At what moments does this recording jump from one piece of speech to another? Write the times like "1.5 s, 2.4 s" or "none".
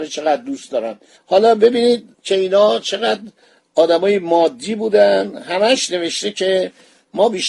2.1 s

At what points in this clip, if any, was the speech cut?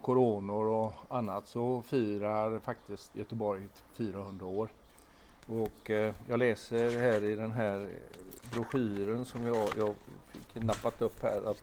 3.1 s

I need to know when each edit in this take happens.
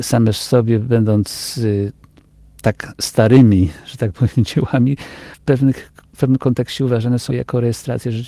7.3 s

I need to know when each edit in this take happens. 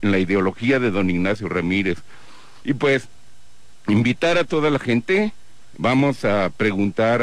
2.6 s, 5.8 s

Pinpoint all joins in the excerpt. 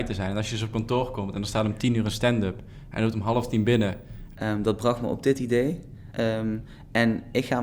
4.4 s, 6.1 s

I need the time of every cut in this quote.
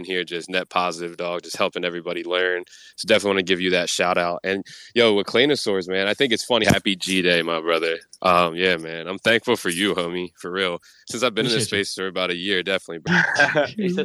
6.6 s, 13.1 s

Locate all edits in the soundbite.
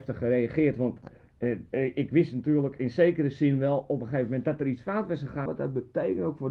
5.5 s

